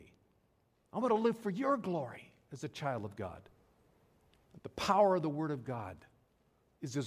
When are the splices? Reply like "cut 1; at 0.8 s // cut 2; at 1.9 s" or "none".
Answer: cut 1; at 4.6 s